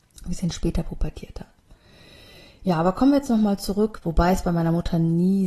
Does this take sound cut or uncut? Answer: cut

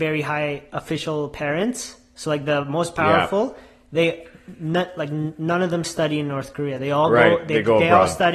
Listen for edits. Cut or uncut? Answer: uncut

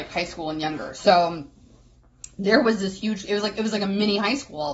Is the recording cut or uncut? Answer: uncut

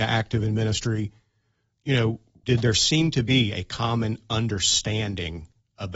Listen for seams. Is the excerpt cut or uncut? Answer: cut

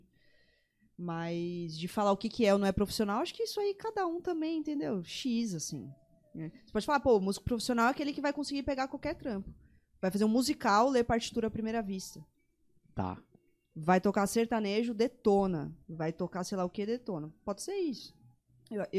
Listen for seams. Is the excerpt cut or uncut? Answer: uncut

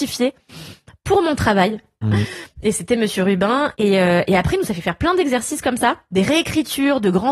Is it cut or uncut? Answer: cut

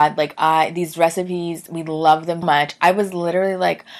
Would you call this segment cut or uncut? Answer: cut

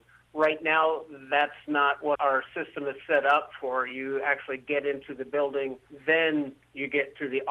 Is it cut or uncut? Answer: uncut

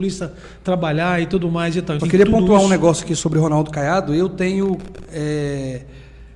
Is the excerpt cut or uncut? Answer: cut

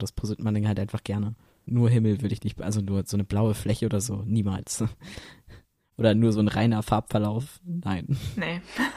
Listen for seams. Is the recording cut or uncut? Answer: uncut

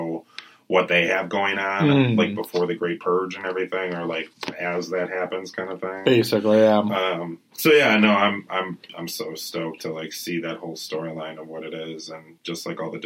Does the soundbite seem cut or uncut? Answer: uncut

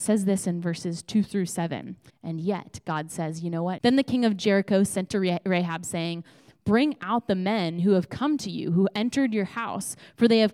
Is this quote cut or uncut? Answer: cut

